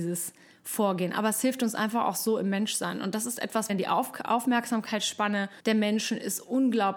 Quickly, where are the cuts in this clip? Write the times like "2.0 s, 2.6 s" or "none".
3.7 s, 5.6 s